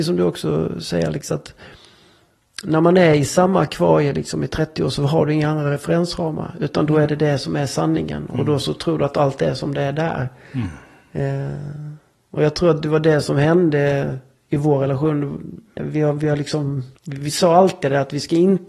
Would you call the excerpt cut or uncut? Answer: cut